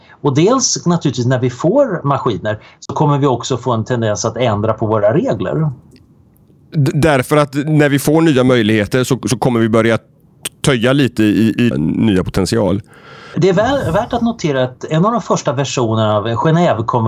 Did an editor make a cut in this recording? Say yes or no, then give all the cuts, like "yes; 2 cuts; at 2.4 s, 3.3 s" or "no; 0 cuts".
yes; 2 cuts; at 11.7 s, 13.3 s